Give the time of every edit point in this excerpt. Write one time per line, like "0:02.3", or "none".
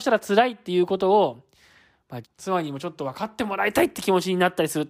0:02.2